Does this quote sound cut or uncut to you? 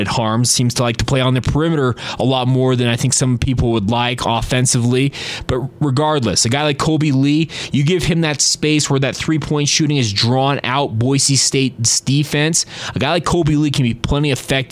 uncut